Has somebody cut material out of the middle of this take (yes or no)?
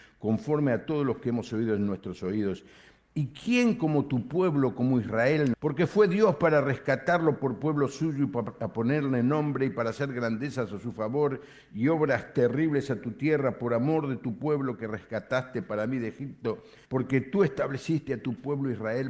yes